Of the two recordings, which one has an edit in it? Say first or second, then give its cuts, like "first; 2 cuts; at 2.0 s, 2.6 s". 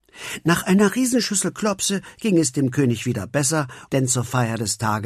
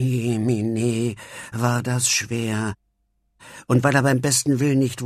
first; 1 cut; at 3.9 s